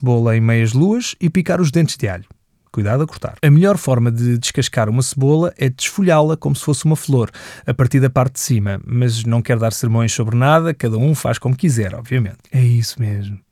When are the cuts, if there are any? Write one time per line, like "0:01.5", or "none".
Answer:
0:03.4